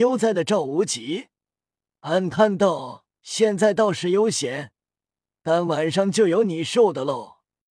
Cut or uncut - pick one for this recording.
uncut